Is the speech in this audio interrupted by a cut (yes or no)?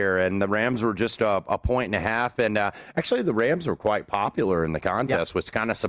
no